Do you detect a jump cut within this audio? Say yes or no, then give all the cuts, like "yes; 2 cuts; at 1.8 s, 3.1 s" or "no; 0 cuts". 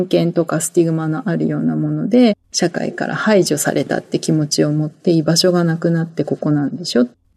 no; 0 cuts